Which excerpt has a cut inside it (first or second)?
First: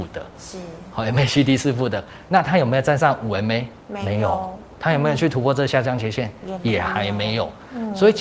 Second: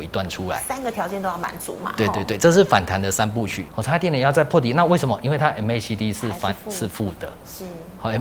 second